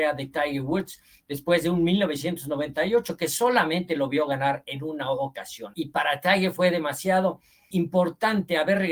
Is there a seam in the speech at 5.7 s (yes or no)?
yes